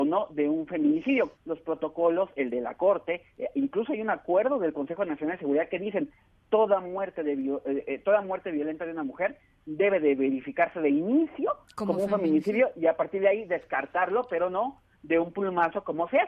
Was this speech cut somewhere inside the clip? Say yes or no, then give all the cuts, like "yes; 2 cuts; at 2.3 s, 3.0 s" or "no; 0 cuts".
yes; 1 cut; at 1.4 s